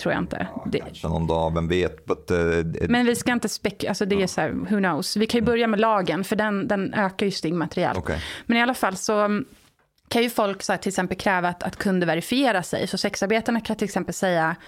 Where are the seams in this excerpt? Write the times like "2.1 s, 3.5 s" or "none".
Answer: none